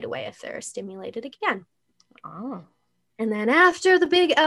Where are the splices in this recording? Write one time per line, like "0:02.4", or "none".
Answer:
none